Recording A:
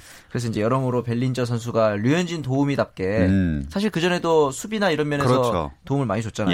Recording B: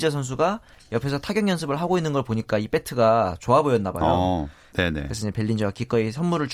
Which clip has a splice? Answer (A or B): B